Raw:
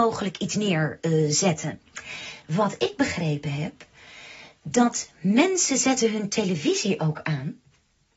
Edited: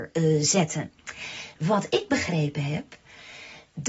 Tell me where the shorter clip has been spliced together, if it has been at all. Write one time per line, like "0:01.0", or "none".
none

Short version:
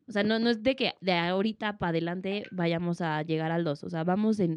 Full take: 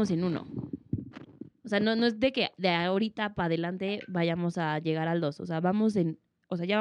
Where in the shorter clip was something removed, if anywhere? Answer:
none

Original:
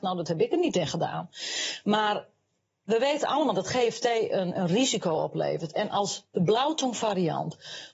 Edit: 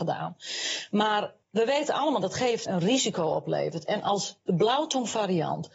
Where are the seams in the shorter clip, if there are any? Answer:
0:01.4
0:02.7

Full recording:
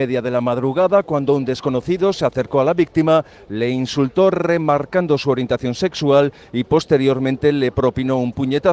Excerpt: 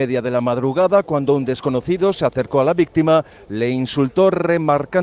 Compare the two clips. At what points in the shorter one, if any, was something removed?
none

